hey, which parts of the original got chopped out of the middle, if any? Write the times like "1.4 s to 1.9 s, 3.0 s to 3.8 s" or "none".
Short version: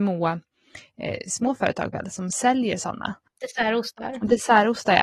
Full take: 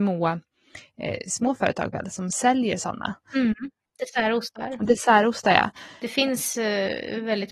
3.3 s to 3.9 s